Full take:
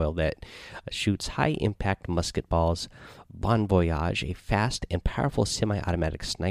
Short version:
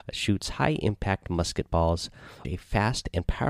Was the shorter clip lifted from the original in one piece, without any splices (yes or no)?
no